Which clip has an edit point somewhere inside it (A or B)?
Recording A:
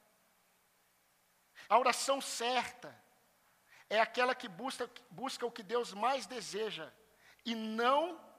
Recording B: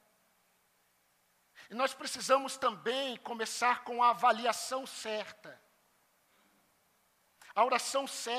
A